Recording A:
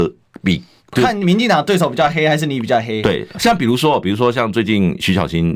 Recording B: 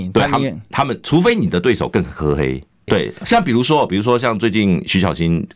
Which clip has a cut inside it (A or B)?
B